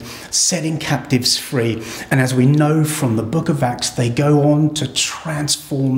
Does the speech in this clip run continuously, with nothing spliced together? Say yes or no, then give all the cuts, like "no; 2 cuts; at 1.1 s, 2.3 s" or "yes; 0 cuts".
yes; 0 cuts